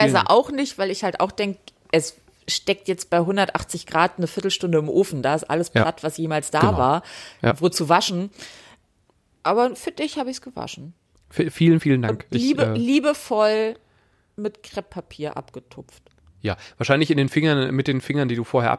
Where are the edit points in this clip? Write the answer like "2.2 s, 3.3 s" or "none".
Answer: none